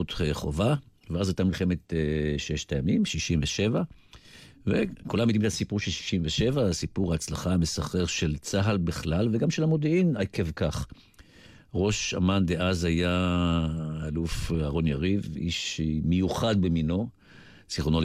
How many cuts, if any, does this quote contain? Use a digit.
0